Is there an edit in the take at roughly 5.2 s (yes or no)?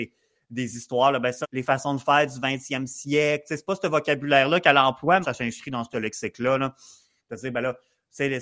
yes